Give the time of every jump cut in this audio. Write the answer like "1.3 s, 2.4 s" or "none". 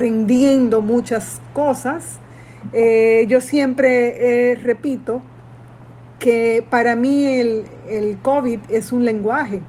none